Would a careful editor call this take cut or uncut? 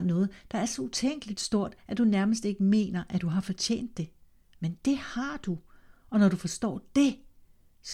uncut